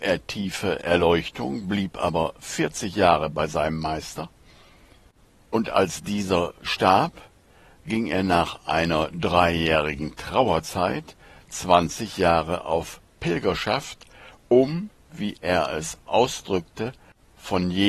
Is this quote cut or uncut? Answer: uncut